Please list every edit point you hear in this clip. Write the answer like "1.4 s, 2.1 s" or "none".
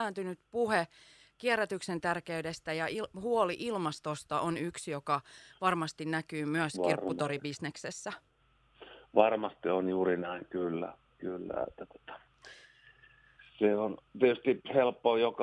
none